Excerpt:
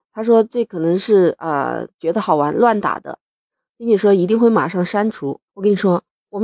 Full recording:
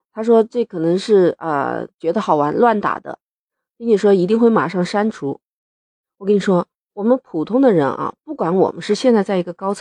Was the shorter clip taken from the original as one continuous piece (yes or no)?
no